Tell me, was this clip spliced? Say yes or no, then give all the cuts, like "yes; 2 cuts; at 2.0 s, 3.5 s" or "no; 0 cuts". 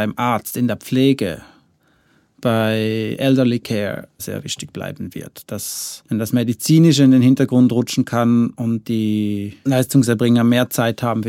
yes; 1 cut; at 4.2 s